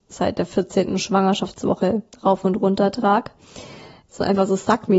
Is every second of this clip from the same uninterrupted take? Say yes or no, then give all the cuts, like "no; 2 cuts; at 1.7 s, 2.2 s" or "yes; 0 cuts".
no; 1 cut; at 4.1 s